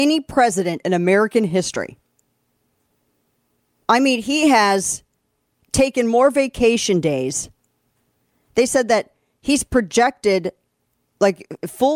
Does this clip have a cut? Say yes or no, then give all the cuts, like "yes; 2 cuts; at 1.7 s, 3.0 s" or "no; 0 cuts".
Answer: no; 0 cuts